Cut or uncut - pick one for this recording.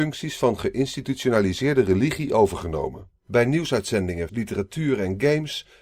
cut